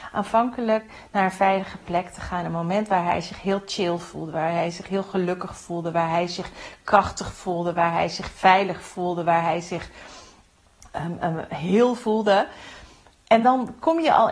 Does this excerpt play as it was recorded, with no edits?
yes; 0 cuts

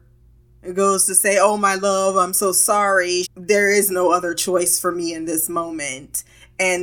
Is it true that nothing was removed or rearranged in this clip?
no; 1 cut; at 3.2 s

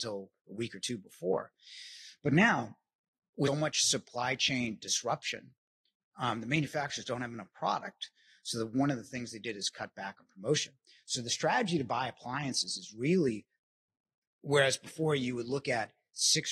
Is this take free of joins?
no; 1 cut; at 3.5 s

